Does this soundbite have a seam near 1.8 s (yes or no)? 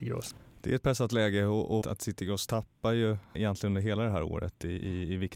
yes